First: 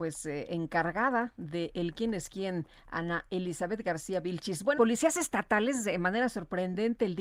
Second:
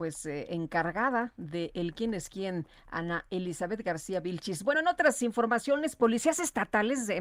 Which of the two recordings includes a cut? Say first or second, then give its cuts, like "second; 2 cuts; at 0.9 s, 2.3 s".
first; 1 cut; at 4.7 s